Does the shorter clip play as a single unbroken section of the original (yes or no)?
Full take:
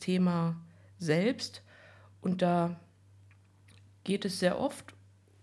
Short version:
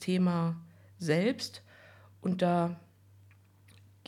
yes